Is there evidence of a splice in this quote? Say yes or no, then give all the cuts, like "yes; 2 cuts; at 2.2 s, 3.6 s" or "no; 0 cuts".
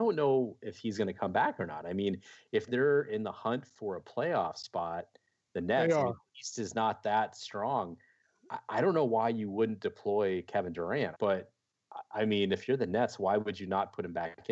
yes; 1 cut; at 11.1 s